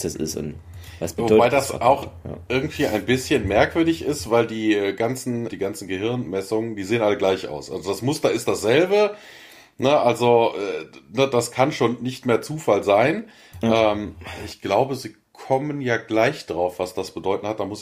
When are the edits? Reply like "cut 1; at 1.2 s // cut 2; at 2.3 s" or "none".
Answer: cut 1; at 5.5 s